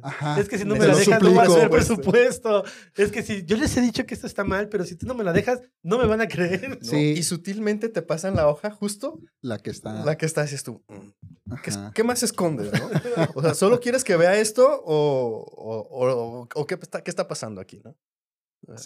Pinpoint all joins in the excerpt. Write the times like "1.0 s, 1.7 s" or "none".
none